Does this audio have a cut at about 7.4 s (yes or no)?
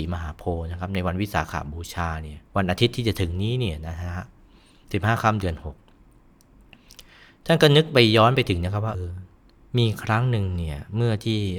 no